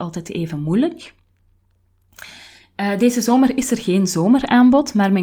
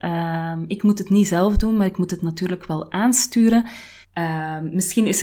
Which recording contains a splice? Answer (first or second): second